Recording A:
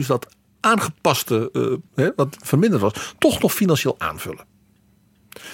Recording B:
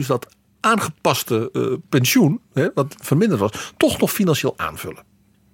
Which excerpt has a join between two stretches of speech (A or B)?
A